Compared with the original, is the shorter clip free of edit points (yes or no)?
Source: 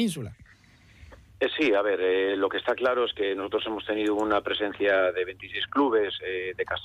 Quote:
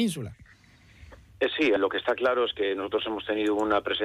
no